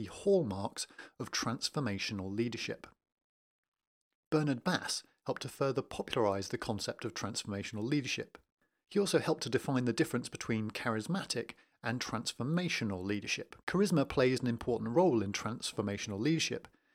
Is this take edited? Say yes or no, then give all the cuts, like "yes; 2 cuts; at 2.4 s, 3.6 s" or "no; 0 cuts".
yes; 1 cut; at 13.6 s